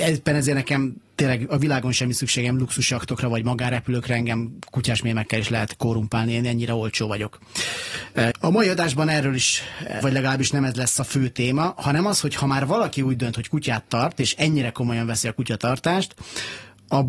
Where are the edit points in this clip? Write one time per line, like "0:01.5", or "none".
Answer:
0:08.3
0:10.0